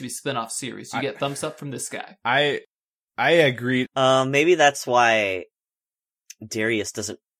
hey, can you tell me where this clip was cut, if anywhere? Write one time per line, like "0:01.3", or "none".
0:03.9